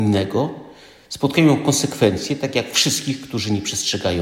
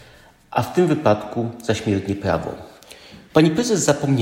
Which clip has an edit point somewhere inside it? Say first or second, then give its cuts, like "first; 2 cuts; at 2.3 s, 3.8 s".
second; 1 cut; at 3.3 s